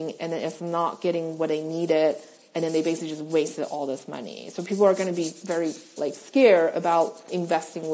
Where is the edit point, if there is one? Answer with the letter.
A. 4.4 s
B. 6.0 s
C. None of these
B